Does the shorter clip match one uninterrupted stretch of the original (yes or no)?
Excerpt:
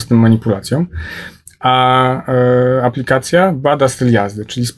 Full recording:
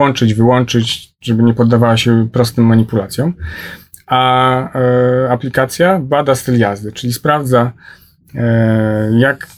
yes